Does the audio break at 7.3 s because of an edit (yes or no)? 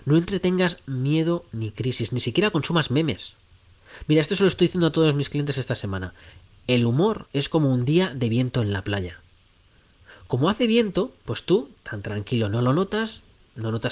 yes